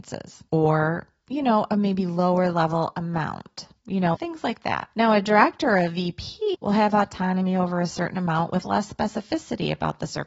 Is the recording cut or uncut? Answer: cut